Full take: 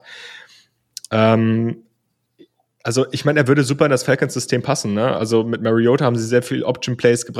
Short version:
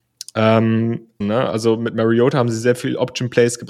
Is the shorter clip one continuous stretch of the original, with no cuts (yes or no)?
no